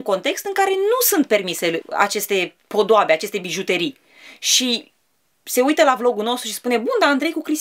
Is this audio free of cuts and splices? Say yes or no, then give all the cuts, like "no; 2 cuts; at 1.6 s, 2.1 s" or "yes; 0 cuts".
no; 1 cut; at 1.8 s